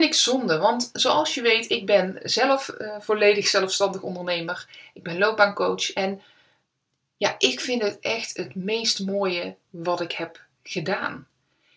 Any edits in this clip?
no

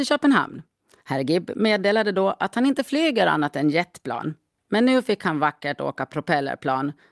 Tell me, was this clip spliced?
yes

